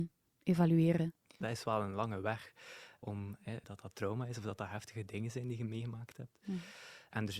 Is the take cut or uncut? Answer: cut